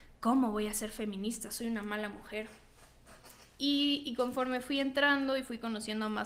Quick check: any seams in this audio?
no; 0 cuts

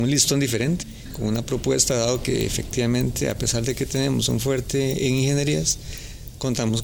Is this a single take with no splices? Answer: yes; 0 cuts

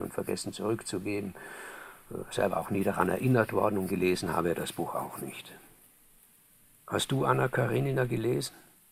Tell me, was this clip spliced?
no; 0 cuts

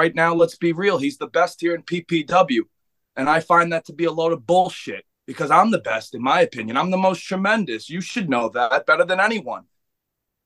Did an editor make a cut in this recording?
yes; 1 cut; at 5.1 s

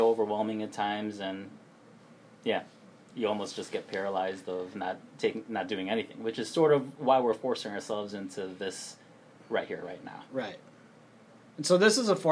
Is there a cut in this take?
no; 0 cuts

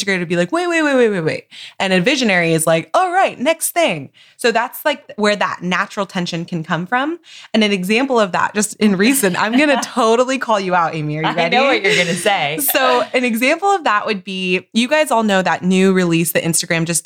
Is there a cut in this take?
no; 0 cuts

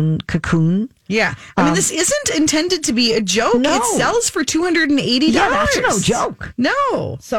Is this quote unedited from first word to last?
yes; 0 cuts

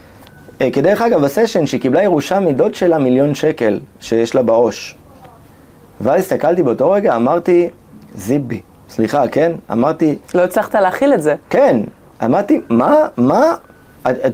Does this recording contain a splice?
no; 0 cuts

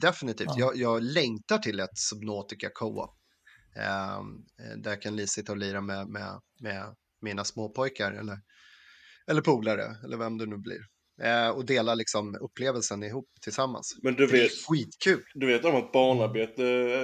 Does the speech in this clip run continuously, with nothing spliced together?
yes; 0 cuts

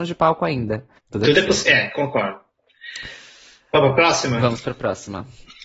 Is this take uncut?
no; 1 cut; at 1.0 s

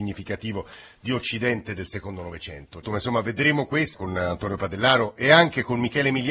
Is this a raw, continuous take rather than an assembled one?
no; 2 cuts; at 2.8 s, 3.9 s

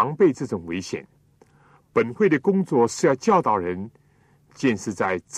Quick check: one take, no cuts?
yes; 0 cuts

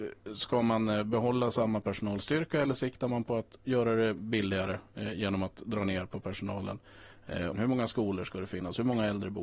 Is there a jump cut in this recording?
yes; 2 cuts; at 3.6 s, 7.5 s

